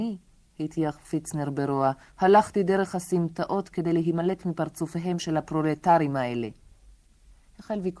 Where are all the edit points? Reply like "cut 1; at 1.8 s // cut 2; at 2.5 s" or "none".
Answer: none